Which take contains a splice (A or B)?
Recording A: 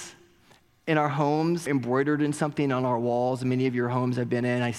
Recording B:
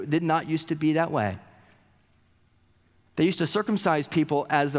A